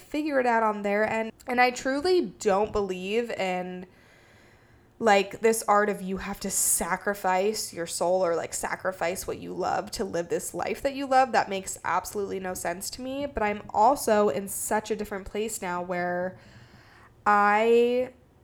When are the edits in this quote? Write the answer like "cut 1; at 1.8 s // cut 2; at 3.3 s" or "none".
cut 1; at 1.3 s